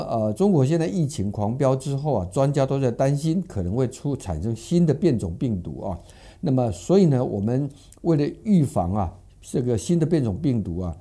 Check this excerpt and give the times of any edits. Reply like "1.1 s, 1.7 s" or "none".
none